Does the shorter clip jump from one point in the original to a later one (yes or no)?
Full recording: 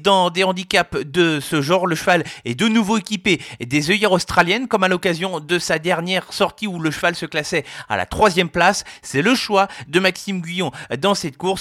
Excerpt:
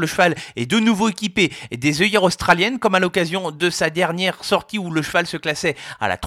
no